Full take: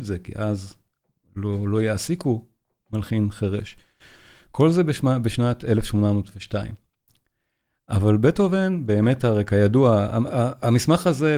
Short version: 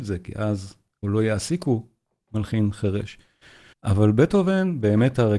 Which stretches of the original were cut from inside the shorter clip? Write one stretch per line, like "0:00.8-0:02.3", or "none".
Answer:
0:01.0-0:01.6
0:04.3-0:07.8